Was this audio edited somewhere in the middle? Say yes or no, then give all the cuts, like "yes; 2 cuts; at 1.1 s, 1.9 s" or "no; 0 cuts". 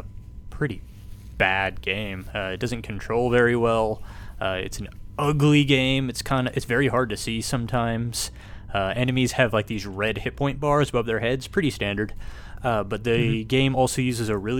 no; 0 cuts